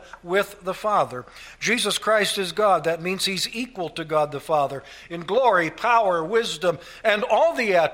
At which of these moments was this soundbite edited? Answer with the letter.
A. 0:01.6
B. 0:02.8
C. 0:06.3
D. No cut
D